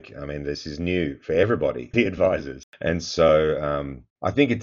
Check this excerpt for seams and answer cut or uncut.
cut